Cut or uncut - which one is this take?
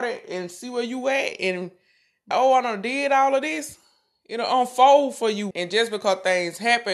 cut